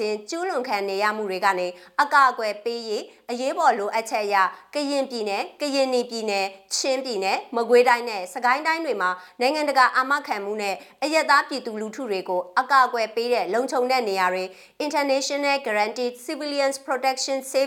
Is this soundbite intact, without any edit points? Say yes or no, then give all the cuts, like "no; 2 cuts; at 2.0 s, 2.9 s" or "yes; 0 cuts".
yes; 0 cuts